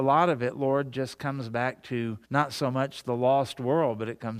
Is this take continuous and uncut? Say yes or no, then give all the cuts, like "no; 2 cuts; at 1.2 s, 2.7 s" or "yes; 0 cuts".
no; 1 cut; at 2.2 s